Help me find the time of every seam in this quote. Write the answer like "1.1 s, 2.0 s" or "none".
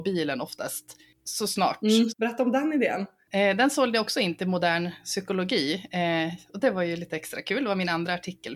2.1 s